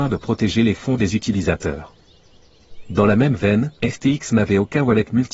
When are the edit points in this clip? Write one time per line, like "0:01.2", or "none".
0:03.8